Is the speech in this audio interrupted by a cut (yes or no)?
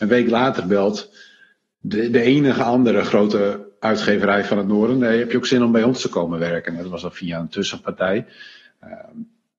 no